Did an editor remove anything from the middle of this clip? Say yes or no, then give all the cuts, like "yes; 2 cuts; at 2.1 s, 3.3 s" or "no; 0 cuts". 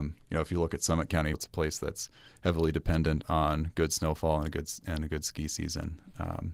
yes; 1 cut; at 1.3 s